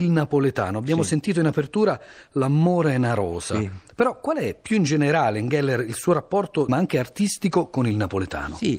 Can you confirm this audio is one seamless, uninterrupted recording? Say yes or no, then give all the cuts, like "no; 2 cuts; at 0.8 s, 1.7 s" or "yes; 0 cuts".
no; 1 cut; at 6.7 s